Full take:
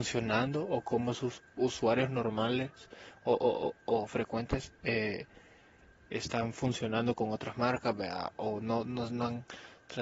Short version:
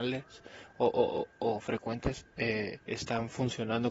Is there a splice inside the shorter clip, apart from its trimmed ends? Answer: yes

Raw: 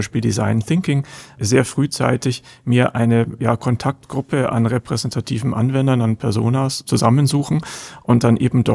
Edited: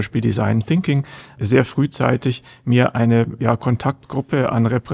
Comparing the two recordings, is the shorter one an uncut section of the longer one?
yes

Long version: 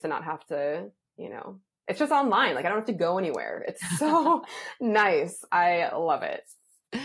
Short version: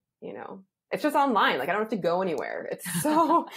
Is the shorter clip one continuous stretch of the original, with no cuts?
yes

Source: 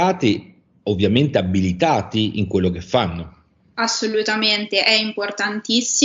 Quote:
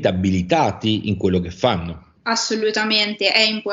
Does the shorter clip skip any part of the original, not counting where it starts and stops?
yes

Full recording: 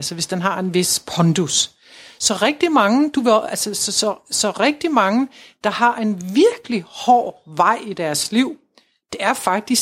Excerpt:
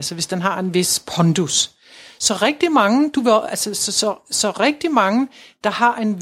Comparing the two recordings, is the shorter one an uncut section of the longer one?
yes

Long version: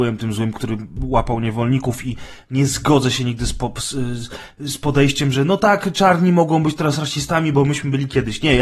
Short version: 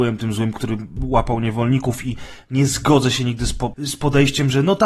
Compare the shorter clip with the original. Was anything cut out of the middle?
yes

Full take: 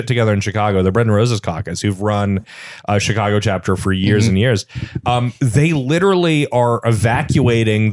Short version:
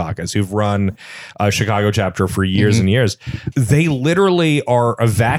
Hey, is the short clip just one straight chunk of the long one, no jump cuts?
no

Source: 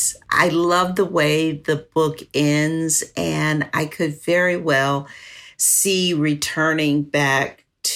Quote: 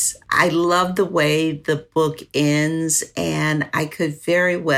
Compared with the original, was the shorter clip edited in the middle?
no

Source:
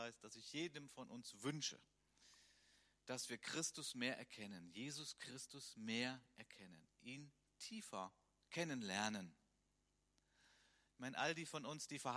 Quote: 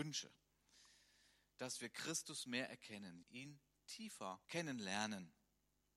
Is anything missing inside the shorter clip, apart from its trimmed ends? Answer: yes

